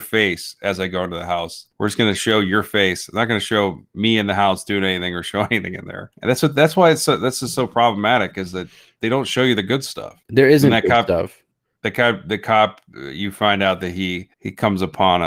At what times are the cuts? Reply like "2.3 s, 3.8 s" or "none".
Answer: none